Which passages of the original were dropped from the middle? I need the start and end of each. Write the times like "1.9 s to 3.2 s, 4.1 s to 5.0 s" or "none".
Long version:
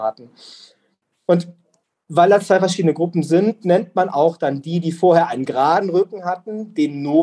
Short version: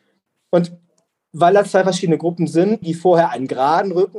3.6 s to 4.8 s